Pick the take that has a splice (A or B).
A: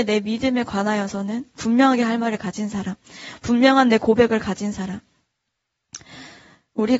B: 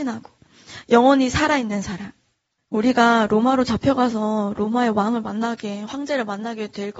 B